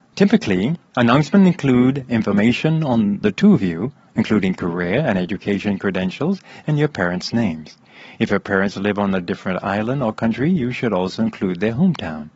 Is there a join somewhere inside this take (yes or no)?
no